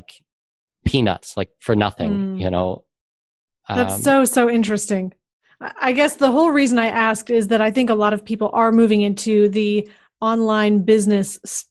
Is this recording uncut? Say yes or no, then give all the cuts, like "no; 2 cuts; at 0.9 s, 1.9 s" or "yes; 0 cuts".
yes; 0 cuts